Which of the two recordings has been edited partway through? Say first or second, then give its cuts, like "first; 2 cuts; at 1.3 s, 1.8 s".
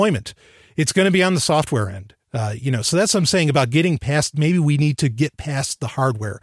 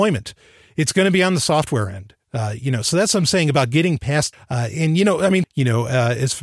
second; 2 cuts; at 4.3 s, 5.4 s